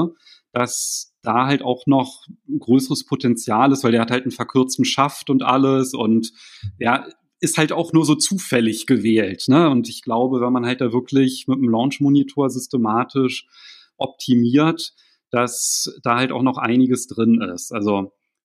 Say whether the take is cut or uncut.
uncut